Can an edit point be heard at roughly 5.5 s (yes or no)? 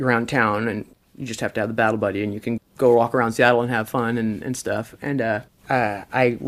no